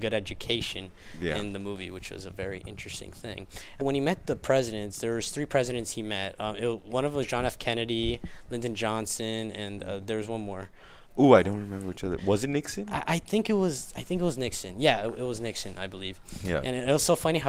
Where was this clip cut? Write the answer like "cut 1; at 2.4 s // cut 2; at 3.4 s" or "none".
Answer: cut 1; at 3.8 s